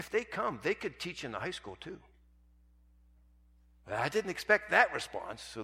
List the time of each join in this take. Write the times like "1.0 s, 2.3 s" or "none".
none